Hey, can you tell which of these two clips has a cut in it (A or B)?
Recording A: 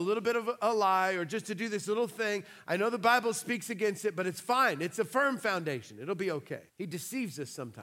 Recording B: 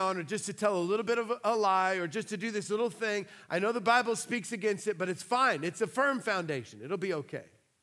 A